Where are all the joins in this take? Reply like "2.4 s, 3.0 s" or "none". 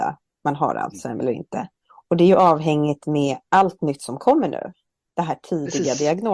none

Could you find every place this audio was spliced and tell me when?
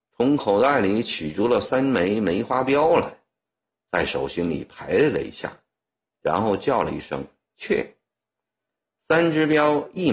none

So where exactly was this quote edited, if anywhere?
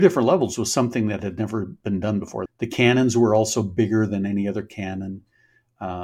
2.5 s

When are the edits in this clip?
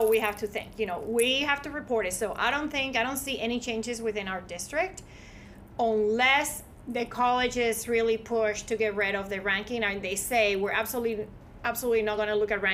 none

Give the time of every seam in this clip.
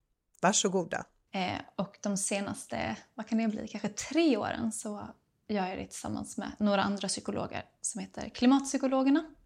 1.3 s

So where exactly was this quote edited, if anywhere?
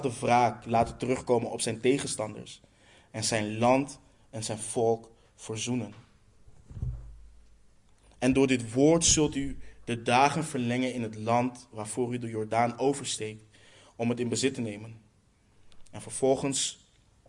8.0 s

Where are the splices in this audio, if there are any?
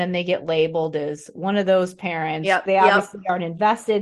2.7 s

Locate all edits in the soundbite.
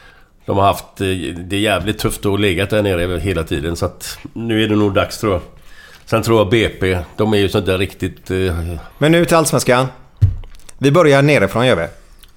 8.9 s

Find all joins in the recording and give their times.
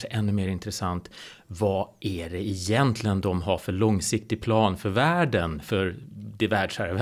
none

